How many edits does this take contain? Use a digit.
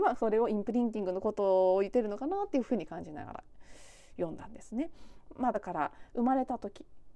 0